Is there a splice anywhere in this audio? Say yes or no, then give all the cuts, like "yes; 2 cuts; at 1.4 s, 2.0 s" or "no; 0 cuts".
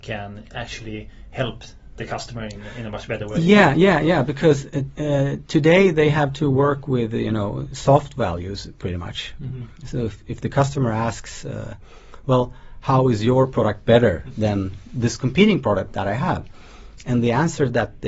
no; 0 cuts